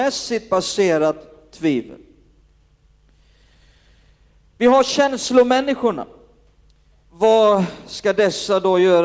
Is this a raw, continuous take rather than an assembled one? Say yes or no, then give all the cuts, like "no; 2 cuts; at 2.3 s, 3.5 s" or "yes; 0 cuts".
no; 1 cut; at 7.1 s